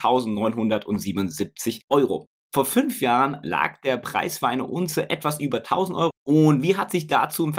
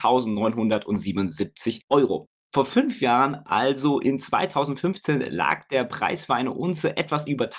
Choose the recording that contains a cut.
first; 2 cuts; at 3.4 s, 6.1 s

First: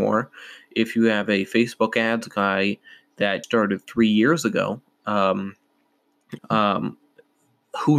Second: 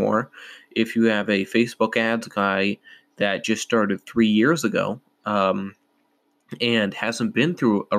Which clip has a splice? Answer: first; 2 cuts; at 3.4 s, 6.4 s

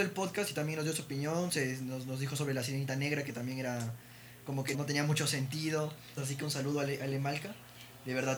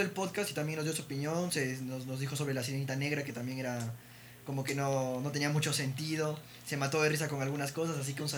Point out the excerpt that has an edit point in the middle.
first; 2 cuts; at 4.7 s, 6.2 s

